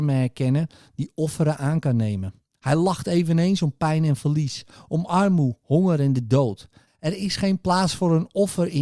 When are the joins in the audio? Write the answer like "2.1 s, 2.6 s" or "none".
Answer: 4.8 s, 6.9 s

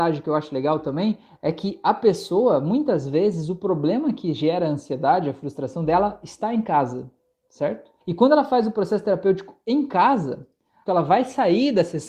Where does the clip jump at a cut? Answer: 8.0 s, 10.9 s

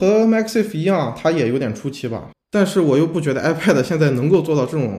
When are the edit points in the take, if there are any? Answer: 2.3 s

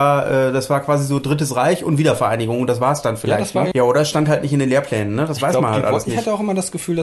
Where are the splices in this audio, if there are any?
3.7 s

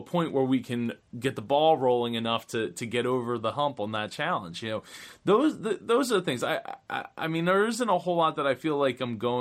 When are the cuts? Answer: none

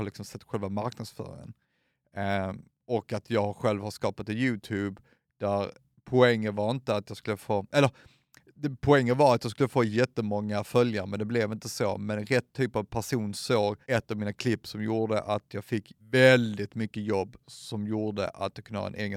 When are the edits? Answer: 13.8 s, 16.0 s

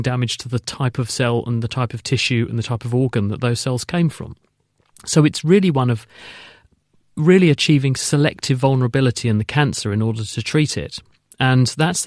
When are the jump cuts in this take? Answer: none

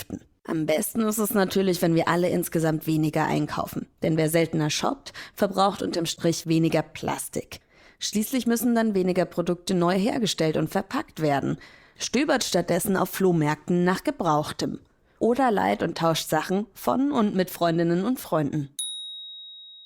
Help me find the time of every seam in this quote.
none

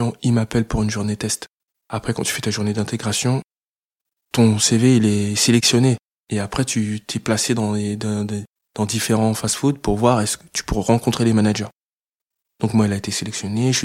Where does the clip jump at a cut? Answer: none

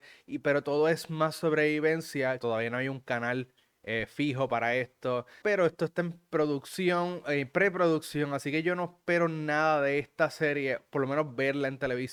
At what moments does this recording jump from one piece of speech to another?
2.4 s, 5.4 s

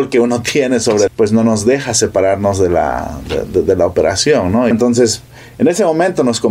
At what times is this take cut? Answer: 1.1 s, 4.7 s

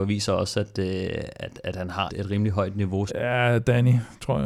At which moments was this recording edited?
2.1 s, 3.1 s

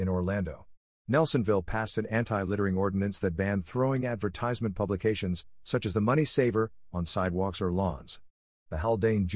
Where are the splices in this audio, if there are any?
0.9 s

